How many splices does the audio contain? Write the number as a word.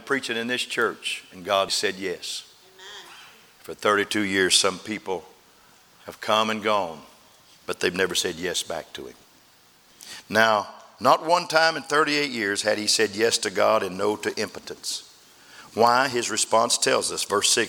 one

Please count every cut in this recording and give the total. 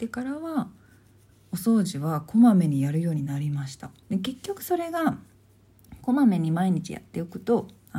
one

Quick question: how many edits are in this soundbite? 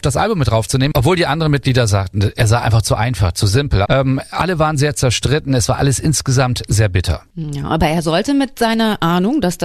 one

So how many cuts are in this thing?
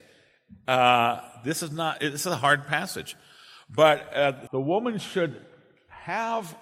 one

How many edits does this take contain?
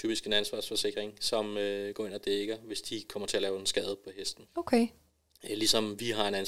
one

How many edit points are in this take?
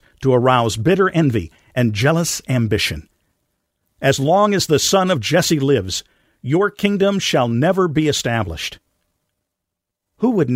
zero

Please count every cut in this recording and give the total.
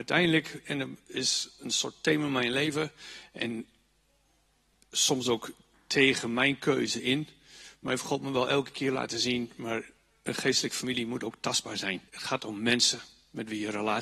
one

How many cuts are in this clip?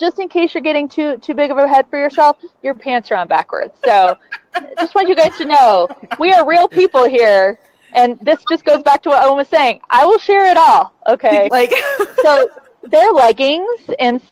one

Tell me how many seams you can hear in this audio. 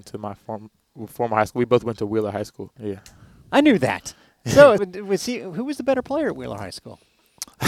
two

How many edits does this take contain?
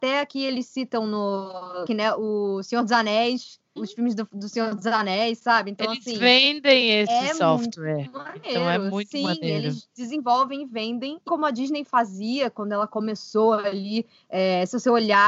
three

